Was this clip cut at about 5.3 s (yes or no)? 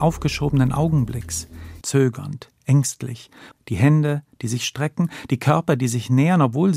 no